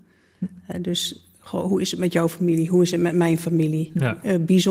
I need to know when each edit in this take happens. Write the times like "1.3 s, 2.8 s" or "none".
none